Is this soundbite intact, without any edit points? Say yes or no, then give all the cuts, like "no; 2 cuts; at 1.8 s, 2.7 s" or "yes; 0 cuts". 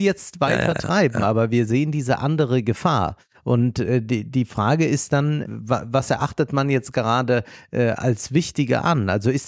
no; 1 cut; at 5.5 s